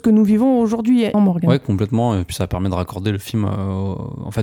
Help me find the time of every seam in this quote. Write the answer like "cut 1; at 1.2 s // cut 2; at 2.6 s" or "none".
cut 1; at 1.1 s